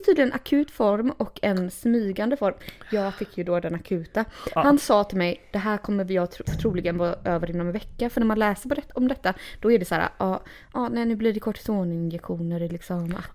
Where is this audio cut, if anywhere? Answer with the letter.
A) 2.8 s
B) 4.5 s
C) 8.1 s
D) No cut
D